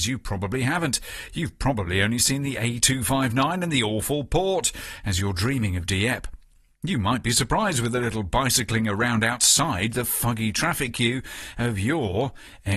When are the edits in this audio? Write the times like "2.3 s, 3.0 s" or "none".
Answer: none